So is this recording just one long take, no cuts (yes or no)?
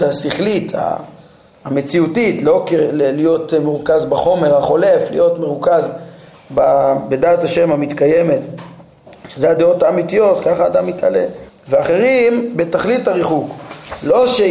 no